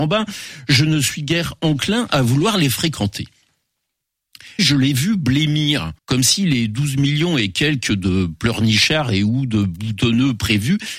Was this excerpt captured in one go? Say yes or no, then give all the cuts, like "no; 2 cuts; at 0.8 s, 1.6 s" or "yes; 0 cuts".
no; 2 cuts; at 4.6 s, 6.0 s